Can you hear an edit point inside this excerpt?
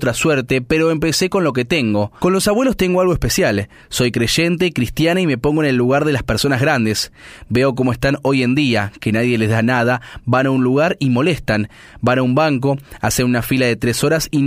yes; 1 cut; at 2.2 s

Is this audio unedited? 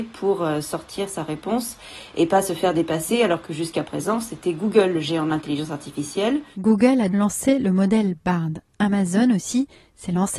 no; 1 cut; at 7.1 s

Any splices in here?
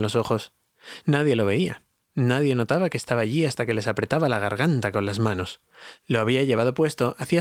yes; 1 cut; at 1.0 s

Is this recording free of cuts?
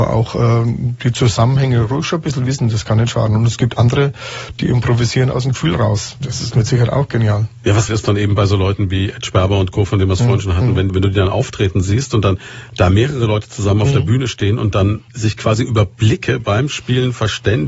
no; 3 cuts; at 7.9 s, 10.9 s, 15.1 s

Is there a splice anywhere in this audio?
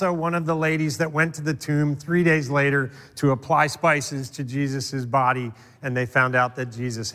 no; 0 cuts

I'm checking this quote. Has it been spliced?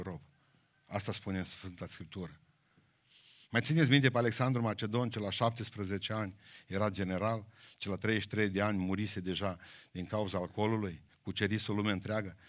no; 0 cuts

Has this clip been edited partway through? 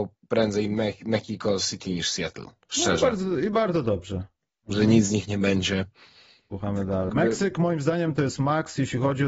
yes; 2 cuts; at 4.5 s, 7.1 s

